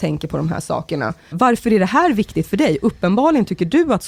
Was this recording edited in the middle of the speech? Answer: yes; 1 cut; at 1.3 s

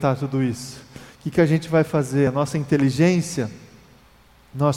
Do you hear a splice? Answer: no; 0 cuts

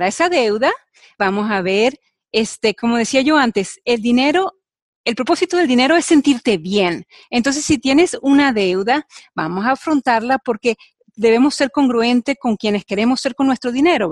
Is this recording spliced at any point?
no; 0 cuts

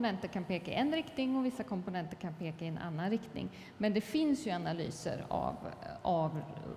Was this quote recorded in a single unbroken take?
yes; 0 cuts

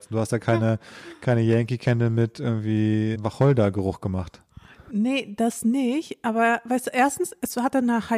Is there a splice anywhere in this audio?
yes; 1 cut; at 3.1 s

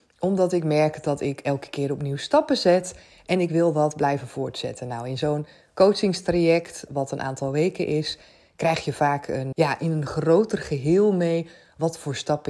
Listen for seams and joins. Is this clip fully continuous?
no; 1 cut; at 9.5 s

